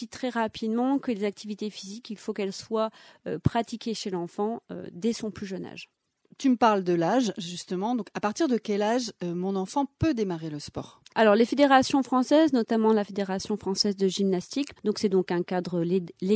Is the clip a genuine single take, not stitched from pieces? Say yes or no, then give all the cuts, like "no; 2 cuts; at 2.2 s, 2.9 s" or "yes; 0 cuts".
no; 2 cuts; at 11.1 s, 14.8 s